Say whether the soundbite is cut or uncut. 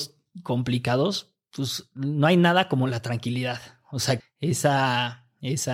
cut